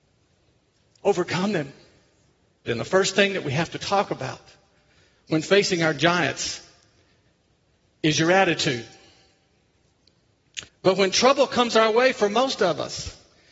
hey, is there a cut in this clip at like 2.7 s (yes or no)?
yes